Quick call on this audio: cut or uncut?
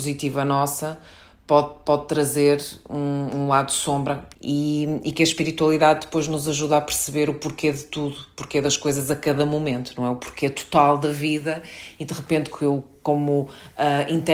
cut